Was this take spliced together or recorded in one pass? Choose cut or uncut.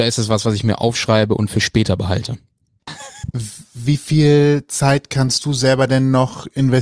cut